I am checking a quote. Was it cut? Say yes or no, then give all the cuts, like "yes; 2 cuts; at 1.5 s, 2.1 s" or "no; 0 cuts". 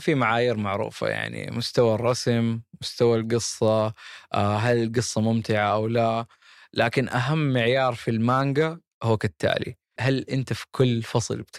yes; 1 cut; at 10.0 s